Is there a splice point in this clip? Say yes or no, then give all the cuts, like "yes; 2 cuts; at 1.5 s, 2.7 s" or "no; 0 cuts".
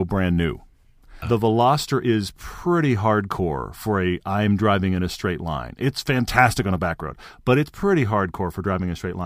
yes; 1 cut; at 1.2 s